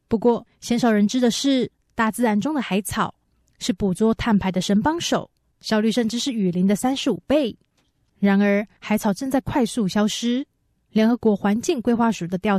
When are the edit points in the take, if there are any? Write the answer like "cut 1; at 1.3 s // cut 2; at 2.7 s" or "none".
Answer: none